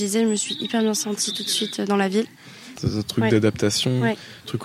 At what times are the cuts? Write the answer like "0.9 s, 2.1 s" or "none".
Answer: 2.8 s